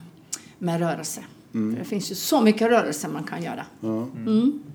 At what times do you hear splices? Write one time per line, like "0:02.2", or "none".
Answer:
none